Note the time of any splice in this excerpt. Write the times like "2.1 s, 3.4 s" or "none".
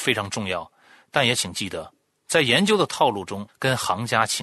3.5 s